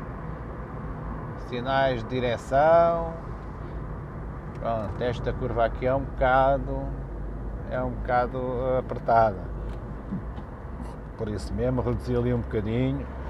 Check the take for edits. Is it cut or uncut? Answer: uncut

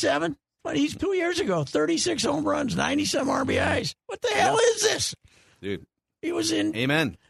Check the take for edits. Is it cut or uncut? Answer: cut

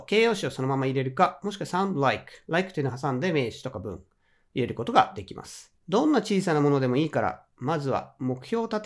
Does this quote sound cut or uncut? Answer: cut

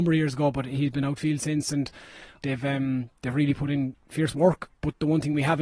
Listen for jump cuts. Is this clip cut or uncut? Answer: cut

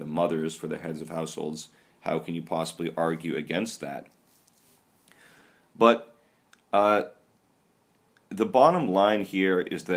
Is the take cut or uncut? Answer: uncut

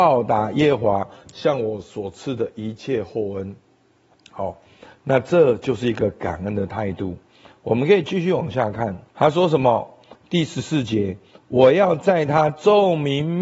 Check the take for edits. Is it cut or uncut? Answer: cut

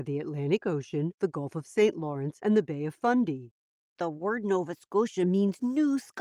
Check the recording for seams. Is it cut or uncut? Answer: uncut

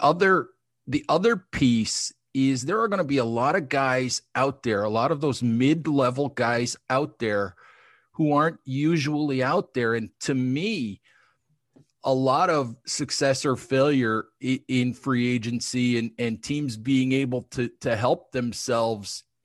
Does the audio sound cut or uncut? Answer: uncut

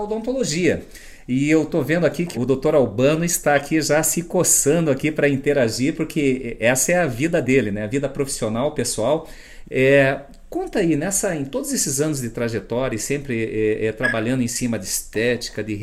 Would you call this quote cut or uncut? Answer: cut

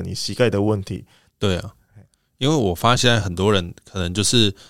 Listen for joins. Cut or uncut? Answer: cut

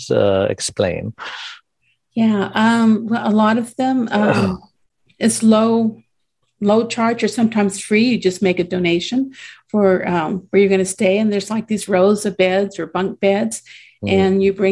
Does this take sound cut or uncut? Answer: uncut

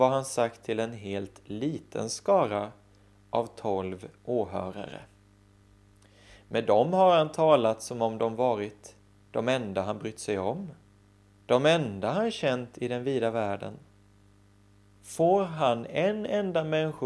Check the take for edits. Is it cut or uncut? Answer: cut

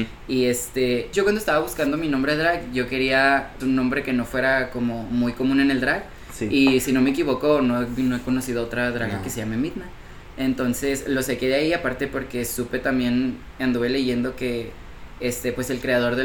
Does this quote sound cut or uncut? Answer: cut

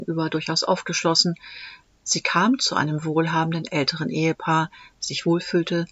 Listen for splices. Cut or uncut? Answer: cut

